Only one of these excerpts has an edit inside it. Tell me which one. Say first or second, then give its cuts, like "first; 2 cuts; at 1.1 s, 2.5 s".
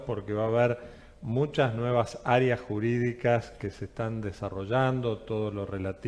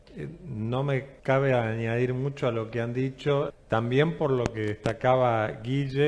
second; 2 cuts; at 1.2 s, 3.5 s